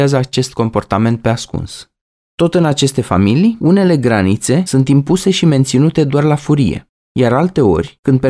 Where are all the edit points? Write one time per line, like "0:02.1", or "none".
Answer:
none